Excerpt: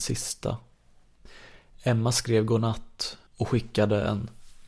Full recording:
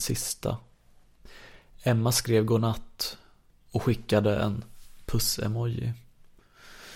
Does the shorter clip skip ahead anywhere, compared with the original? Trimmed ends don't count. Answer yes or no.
yes